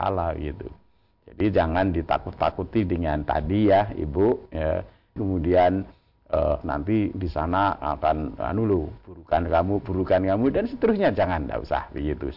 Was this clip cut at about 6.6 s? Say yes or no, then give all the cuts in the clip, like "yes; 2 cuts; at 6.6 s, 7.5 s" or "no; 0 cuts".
yes; 2 cuts; at 5.2 s, 6.6 s